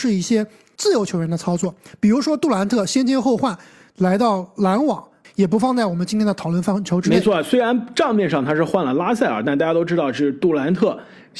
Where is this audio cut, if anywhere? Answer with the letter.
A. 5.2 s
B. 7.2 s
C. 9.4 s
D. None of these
A